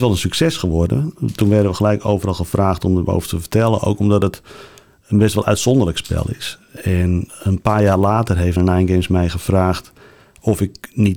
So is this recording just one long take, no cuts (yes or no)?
no